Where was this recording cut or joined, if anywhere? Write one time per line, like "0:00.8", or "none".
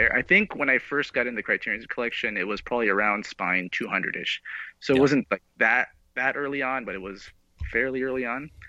none